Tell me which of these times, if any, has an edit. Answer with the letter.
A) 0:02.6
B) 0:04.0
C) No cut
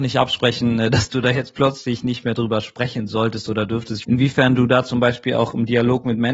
B